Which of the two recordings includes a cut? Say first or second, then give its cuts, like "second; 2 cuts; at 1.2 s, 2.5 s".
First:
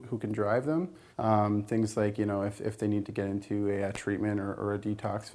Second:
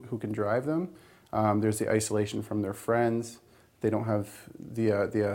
first; 1 cut; at 1.1 s